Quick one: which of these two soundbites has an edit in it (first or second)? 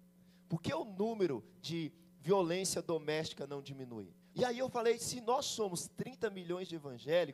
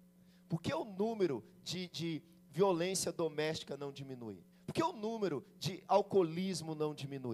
first